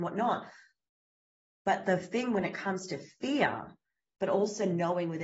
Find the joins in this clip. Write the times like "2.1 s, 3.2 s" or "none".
4.1 s